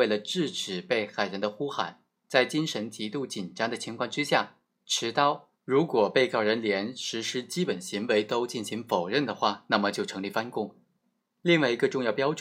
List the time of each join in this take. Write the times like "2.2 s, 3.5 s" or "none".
5.6 s

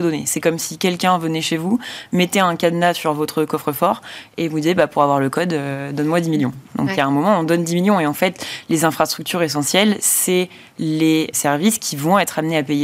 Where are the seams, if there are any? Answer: 11.3 s

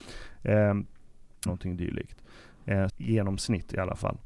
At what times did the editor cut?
1.5 s, 2.9 s

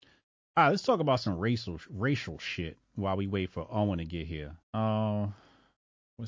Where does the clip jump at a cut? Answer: 4.6 s

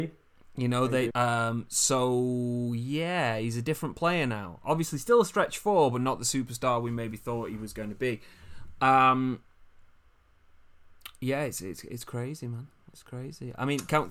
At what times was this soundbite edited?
1.1 s

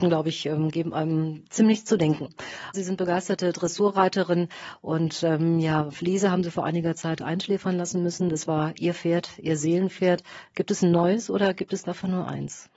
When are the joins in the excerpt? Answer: 2.7 s

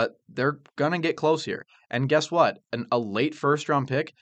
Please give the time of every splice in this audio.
none

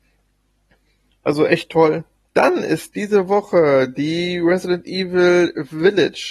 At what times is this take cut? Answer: 2.3 s

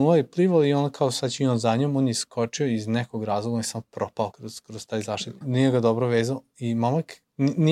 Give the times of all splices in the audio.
4.3 s, 5.4 s

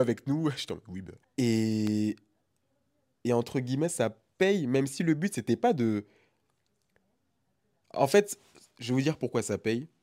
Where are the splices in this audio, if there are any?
1.2 s

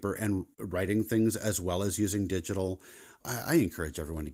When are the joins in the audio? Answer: 3.2 s

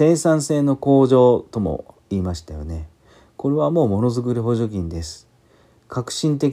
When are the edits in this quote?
none

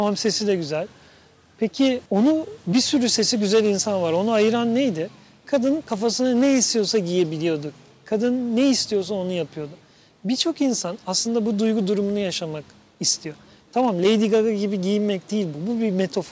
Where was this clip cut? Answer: 2.1 s

